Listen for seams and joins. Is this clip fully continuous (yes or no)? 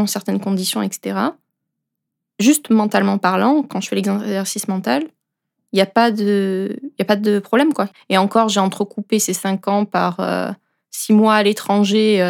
no